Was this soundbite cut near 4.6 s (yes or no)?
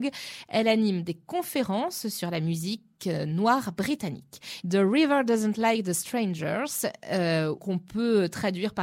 yes